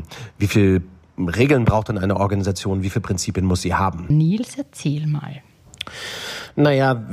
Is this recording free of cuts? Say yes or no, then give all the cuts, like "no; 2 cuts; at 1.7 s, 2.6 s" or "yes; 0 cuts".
no; 1 cut; at 4.1 s